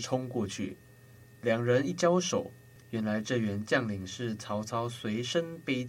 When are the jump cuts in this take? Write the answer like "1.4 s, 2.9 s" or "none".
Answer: 2.8 s